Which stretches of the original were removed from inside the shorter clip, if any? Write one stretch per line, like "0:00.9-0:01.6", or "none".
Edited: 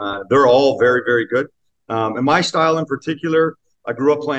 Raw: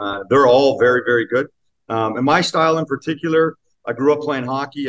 none